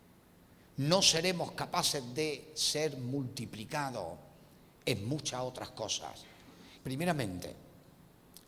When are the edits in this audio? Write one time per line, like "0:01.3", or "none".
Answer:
0:06.8